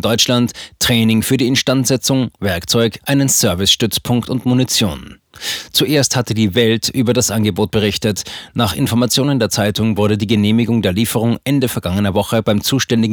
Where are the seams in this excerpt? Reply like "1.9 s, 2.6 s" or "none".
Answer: 3.0 s

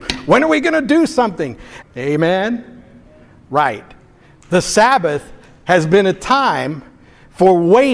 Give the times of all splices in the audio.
1.8 s

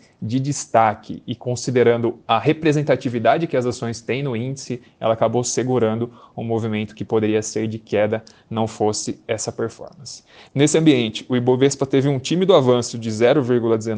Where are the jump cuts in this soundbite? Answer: 2.2 s, 10.5 s

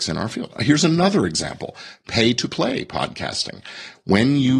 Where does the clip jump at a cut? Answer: none

